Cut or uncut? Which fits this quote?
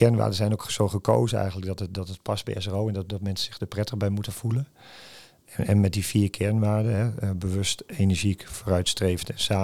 uncut